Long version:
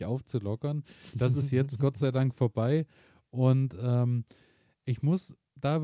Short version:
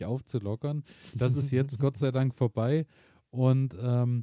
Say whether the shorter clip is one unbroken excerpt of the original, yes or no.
yes